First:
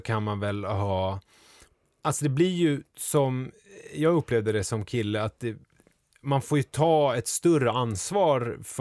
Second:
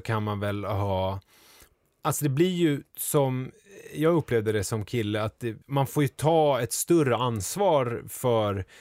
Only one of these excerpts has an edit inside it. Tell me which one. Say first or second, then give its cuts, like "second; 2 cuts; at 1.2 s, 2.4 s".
second; 1 cut; at 5.6 s